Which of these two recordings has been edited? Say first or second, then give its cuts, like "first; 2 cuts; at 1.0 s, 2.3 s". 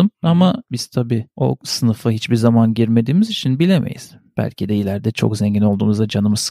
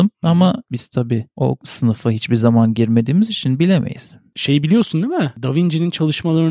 second; 1 cut; at 4.3 s